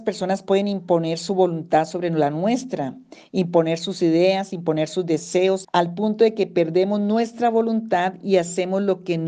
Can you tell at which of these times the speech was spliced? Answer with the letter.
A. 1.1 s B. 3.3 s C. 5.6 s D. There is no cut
C